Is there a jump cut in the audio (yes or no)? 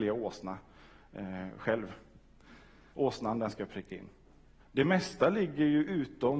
yes